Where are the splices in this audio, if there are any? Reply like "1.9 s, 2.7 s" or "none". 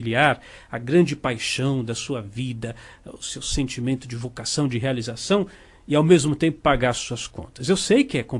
none